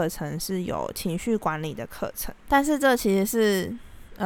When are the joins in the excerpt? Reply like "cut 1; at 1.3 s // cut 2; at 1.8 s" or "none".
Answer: cut 1; at 2.4 s